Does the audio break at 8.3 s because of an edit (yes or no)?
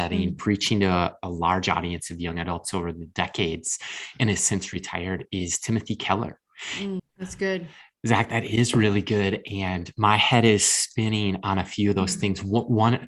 no